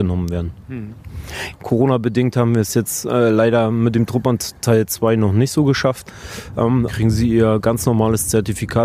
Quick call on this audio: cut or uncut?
cut